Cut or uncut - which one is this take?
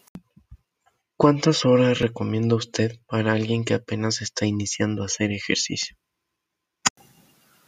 uncut